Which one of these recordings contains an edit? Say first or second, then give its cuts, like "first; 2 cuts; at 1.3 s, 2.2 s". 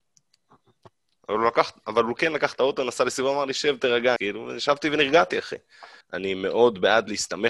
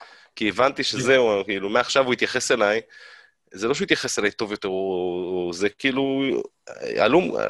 first; 2 cuts; at 4.2 s, 6.0 s